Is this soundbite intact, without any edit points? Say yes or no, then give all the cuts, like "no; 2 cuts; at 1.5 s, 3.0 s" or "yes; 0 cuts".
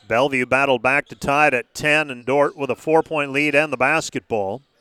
no; 1 cut; at 2.2 s